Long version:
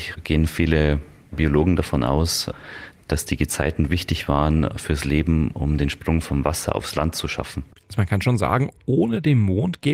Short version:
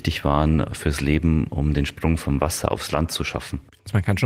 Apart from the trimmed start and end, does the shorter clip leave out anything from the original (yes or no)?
no